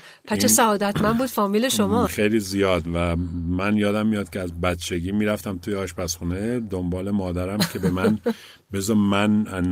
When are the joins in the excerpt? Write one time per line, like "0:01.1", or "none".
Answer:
0:02.1